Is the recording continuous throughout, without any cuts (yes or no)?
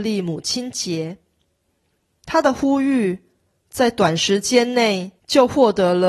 no